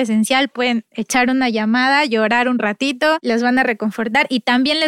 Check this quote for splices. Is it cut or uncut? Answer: uncut